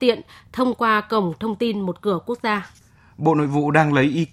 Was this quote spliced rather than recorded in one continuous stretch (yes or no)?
no